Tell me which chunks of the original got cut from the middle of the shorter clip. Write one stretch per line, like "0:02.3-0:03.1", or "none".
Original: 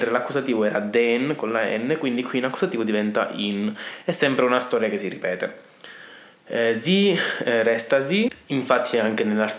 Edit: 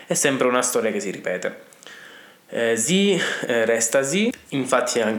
none

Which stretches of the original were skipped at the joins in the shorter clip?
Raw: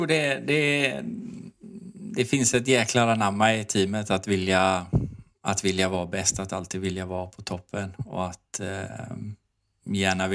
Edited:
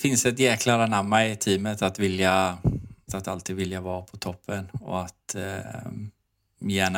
0:05.4-0:06.3

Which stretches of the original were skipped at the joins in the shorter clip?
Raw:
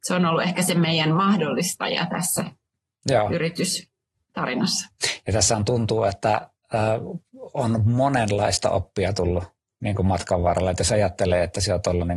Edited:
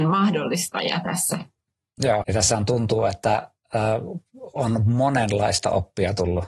0:03.3-0:05.2

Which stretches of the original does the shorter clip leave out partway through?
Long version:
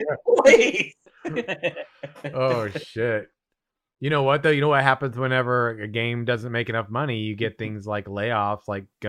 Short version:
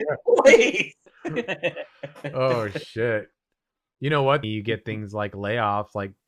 0:04.4-0:07.2

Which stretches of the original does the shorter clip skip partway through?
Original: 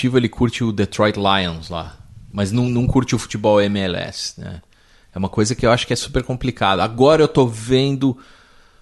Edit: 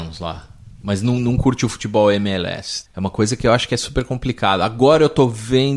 0:04.4-0:05.0

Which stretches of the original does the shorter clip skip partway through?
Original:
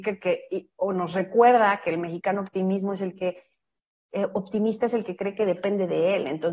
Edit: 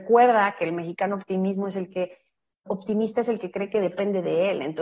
0:03.9-0:04.3

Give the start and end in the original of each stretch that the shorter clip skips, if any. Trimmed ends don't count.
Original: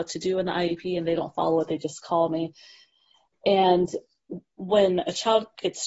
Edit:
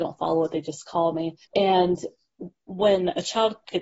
0:02.6-0:03.3

